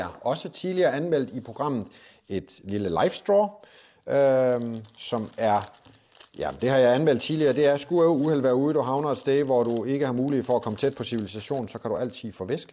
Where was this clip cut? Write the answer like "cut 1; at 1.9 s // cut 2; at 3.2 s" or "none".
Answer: none